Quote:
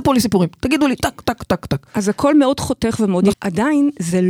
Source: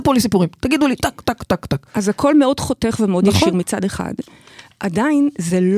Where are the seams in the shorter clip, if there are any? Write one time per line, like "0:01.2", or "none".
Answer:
0:03.3

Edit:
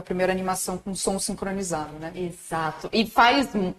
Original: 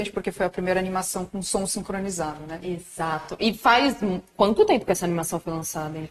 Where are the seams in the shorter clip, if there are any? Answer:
none

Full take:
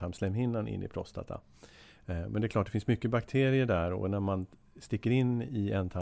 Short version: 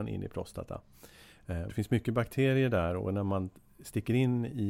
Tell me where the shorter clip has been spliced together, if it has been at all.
0:01.7

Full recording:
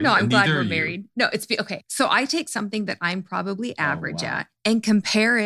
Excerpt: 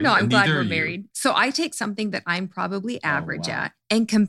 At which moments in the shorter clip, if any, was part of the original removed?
0:01.1

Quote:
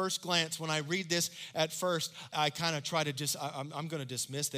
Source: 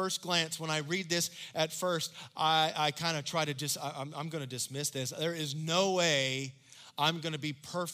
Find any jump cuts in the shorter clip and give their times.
0:02.3

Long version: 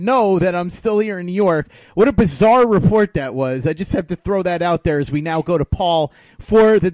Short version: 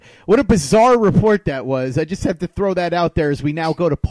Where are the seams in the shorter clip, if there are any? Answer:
none

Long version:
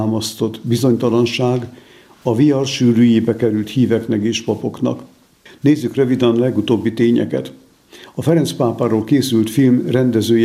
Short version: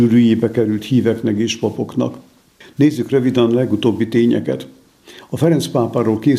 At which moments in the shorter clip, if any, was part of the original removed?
none

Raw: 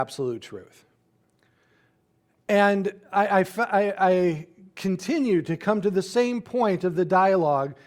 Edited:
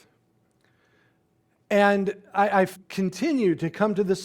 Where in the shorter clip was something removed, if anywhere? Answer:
0:02.7

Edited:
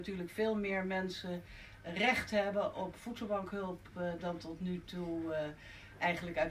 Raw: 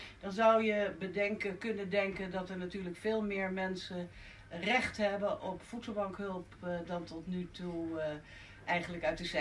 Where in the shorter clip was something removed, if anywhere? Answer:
none

